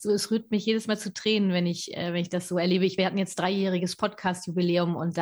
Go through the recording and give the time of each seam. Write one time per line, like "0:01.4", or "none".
none